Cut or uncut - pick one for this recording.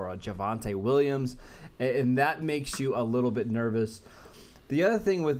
uncut